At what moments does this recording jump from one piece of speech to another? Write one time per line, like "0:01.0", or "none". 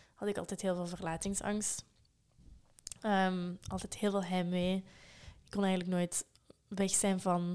none